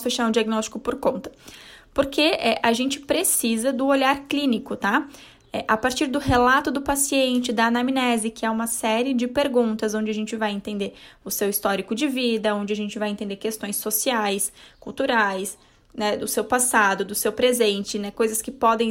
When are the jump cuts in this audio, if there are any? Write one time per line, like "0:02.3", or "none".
none